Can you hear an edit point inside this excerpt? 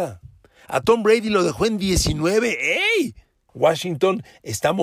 yes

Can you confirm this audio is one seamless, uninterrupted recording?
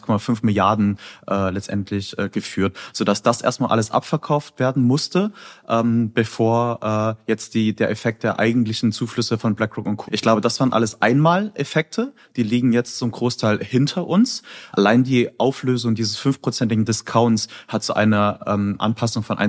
no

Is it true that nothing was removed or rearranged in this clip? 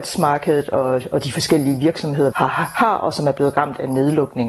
no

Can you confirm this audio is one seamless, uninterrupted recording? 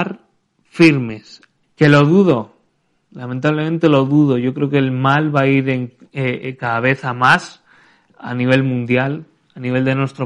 no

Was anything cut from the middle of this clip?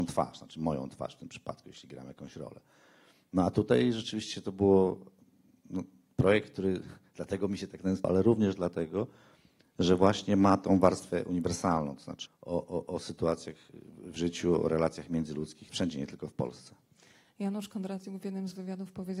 yes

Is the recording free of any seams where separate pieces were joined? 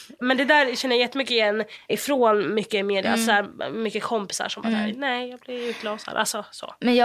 yes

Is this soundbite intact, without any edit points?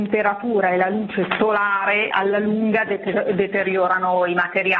no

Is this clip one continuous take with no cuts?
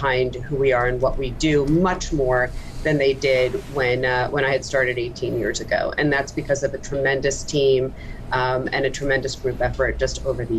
yes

